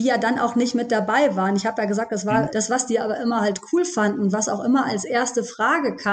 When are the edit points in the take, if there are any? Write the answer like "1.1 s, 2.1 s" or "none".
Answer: 2.5 s